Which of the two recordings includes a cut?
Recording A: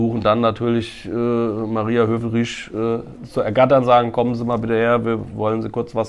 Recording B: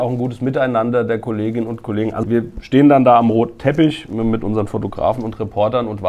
B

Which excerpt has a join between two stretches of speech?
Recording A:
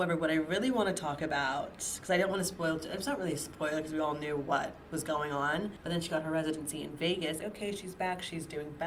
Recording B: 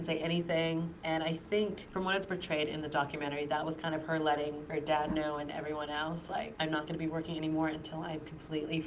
A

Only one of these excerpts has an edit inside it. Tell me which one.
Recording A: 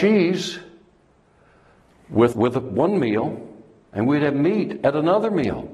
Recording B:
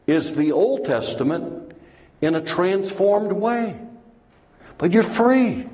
A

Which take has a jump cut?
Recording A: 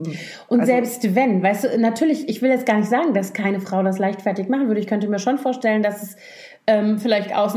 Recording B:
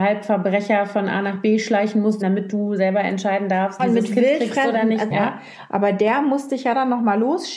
B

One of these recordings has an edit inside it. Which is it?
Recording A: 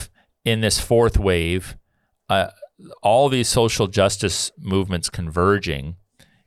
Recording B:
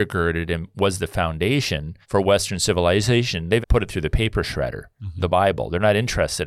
B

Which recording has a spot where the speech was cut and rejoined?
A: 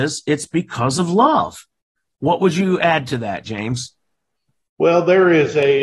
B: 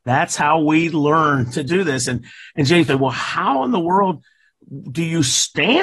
B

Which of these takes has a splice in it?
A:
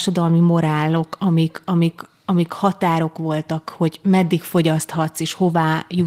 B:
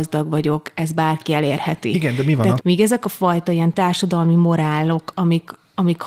B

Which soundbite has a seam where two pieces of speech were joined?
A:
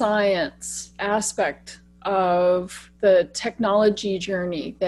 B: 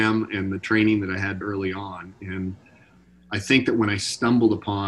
B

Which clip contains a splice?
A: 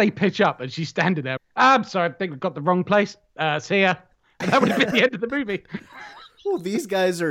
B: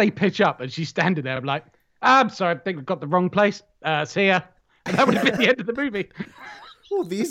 A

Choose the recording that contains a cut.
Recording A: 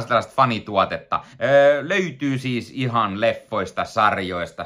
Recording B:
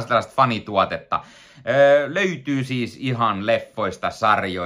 A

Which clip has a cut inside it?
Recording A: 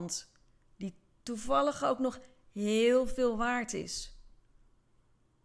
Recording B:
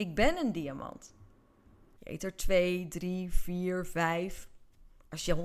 B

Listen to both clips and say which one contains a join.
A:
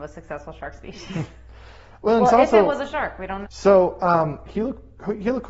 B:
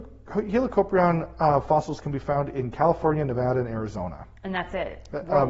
A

